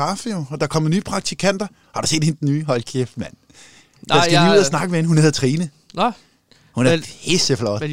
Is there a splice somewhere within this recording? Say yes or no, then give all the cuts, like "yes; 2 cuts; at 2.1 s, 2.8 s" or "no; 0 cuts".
no; 0 cuts